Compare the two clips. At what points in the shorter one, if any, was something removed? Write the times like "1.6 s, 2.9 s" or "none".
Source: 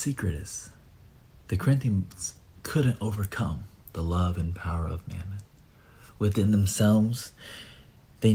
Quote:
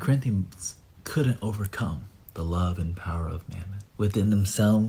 3.9 s